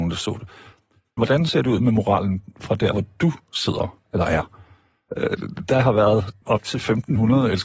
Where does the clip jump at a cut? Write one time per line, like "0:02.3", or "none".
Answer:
0:01.2
0:05.1
0:06.4